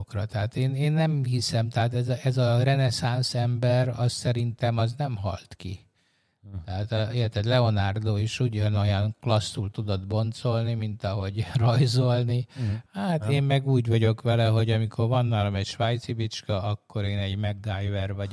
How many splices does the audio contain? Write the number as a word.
one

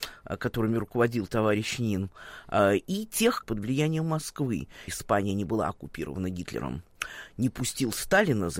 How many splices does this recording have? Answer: two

